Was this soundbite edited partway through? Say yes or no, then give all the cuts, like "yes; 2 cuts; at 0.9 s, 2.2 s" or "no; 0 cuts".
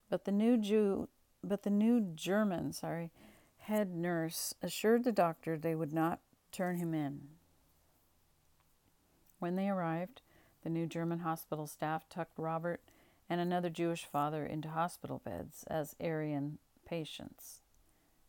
no; 0 cuts